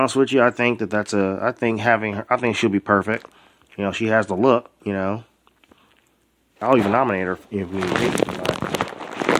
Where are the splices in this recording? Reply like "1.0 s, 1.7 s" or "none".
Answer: 6.6 s

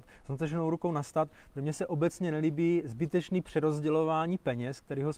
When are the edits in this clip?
none

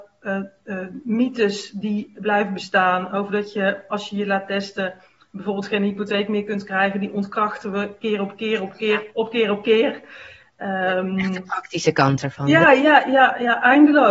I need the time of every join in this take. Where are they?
none

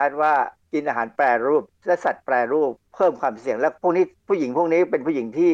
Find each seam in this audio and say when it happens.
none

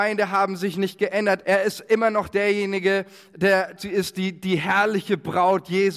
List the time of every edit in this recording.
1.4 s, 3.8 s

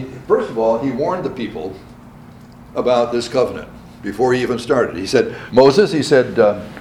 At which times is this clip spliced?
5.5 s

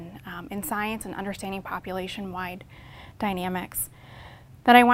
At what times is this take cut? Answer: none

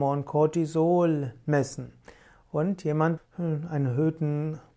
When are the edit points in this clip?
3.2 s

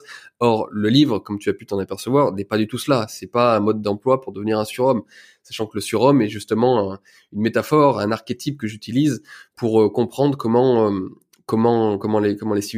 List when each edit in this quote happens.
none

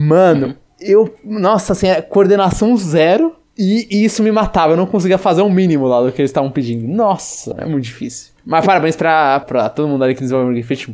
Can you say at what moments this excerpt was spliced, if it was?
7.5 s, 9.4 s

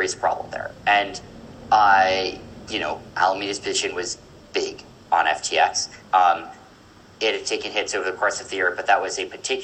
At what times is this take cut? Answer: 6.0 s

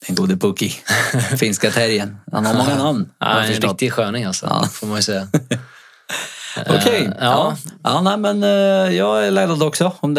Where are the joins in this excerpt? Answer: none

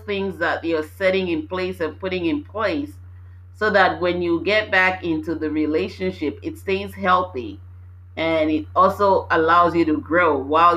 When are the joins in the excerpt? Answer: none

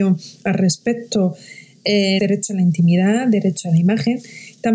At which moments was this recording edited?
2.2 s

